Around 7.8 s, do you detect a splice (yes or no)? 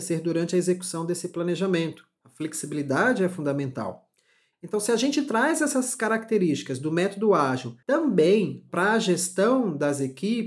yes